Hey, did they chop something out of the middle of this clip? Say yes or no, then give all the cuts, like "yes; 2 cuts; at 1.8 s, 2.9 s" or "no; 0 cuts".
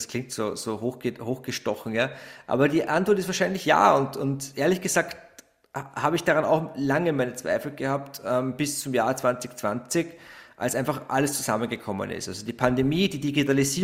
no; 0 cuts